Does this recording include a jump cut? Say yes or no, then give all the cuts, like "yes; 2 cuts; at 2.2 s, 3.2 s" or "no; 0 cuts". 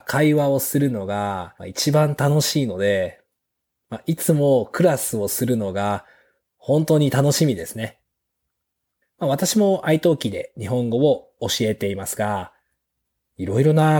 yes; 2 cuts; at 1.6 s, 9.0 s